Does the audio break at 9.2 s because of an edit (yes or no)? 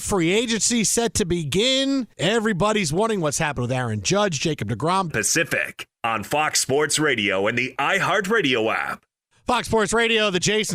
no